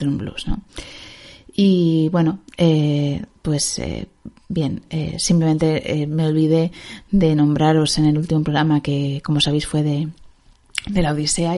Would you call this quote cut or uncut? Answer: uncut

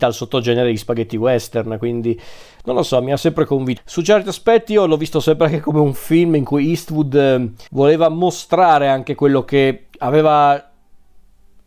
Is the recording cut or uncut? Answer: cut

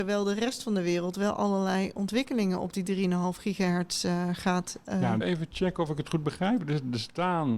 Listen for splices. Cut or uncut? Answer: cut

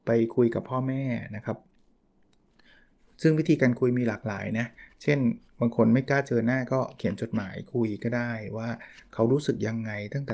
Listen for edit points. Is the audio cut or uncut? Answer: uncut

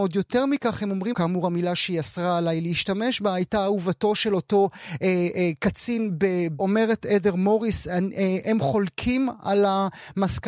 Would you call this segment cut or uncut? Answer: cut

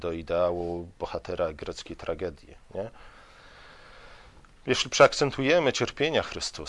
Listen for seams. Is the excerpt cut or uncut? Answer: uncut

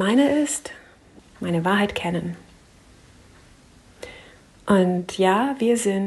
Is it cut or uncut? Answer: cut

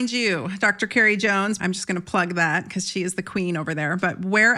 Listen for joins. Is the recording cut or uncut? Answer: cut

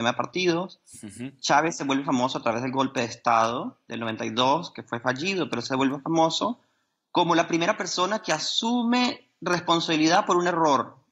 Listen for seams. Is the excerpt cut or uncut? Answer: uncut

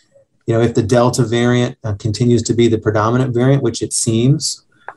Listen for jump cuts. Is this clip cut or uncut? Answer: uncut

